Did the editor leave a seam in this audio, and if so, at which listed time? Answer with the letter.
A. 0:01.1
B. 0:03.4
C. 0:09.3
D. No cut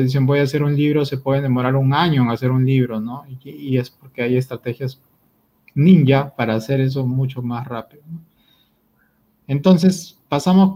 D